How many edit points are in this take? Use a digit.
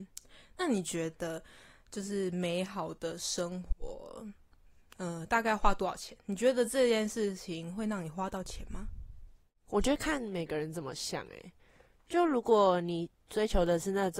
0